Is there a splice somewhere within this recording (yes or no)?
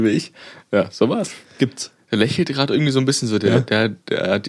yes